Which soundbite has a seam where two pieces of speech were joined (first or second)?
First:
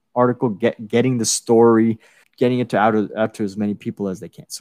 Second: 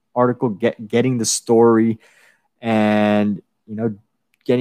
first